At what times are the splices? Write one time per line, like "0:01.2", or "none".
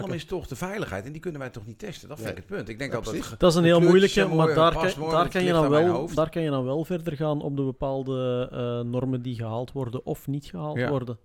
none